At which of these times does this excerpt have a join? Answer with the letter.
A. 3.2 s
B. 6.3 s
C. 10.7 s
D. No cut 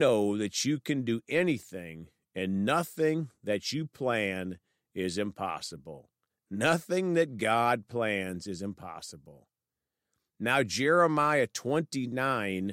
B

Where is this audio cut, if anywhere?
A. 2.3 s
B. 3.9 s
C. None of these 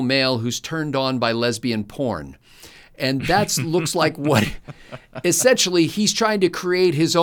C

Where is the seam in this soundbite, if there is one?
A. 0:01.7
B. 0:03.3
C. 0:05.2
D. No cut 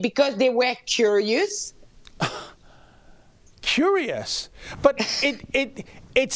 D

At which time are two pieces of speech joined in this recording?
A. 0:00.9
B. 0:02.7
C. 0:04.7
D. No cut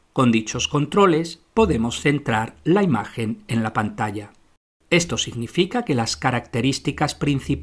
C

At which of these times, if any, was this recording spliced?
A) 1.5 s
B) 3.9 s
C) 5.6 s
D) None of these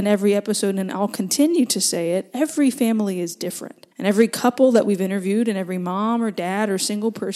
B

